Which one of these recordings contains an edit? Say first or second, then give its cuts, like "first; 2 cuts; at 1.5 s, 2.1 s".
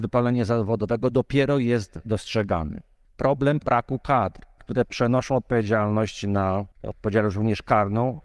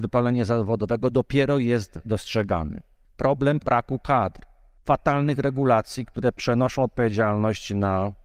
first; 2 cuts; at 4.6 s, 6.7 s